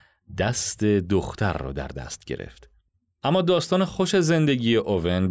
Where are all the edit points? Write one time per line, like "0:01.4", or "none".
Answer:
none